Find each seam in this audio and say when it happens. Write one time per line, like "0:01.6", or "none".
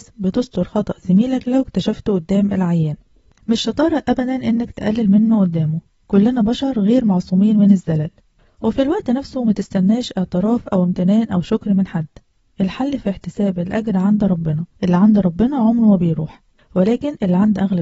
0:14.7